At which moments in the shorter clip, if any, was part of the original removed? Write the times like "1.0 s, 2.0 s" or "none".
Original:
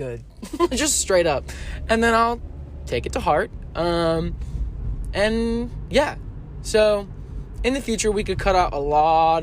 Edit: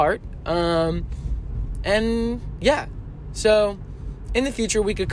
none